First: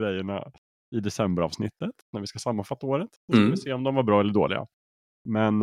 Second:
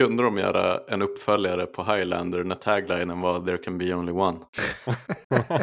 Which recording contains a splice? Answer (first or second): second